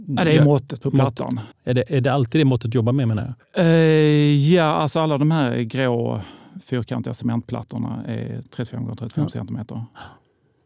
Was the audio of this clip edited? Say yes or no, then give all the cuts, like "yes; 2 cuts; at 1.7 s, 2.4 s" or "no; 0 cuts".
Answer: yes; 1 cut; at 1.5 s